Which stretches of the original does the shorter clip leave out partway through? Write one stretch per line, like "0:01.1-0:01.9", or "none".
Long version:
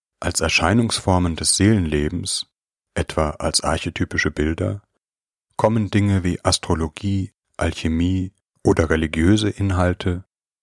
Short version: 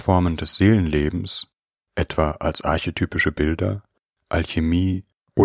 0:05.1-0:07.4